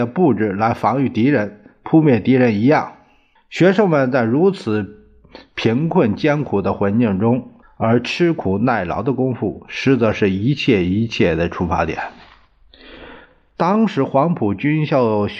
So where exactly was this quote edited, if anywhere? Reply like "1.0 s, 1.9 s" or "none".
3.4 s, 7.6 s

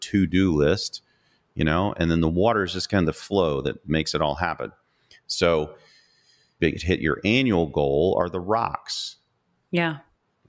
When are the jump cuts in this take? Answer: 6.6 s

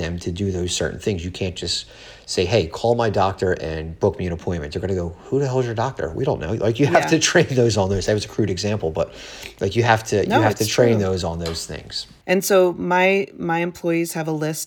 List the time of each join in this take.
12.2 s

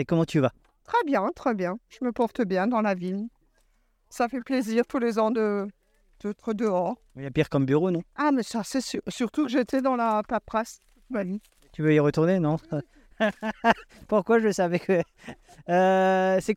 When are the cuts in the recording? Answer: none

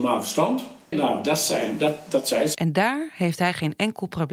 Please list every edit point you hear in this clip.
0.9 s, 2.5 s

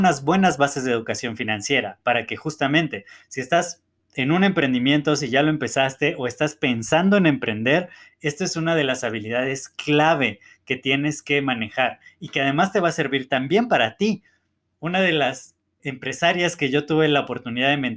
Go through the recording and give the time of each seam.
15.8 s

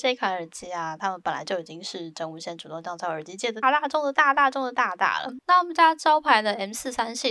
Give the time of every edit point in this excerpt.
3.6 s, 5.4 s

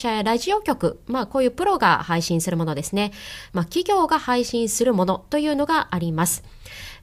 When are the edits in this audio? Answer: 3.5 s

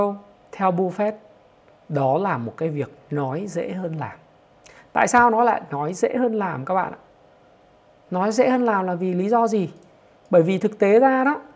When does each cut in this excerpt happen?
none

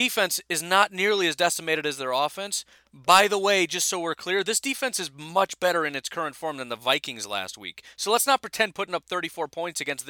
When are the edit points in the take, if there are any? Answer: none

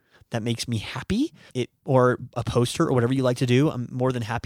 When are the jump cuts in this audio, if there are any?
1.5 s

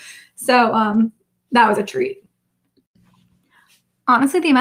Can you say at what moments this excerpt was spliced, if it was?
none

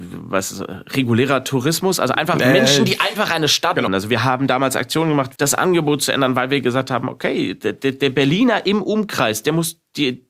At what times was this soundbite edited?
3.9 s, 5.4 s

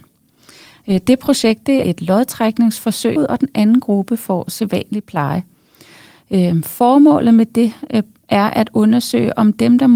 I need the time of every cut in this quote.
1.8 s, 3.2 s

